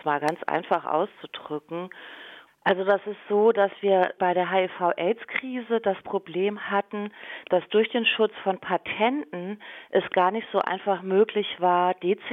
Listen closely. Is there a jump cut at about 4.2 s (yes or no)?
yes